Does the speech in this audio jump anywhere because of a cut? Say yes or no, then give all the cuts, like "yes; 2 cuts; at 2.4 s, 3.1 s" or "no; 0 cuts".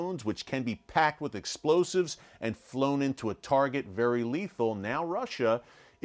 no; 0 cuts